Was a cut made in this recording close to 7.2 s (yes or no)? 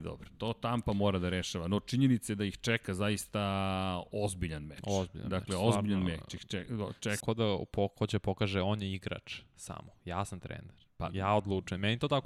yes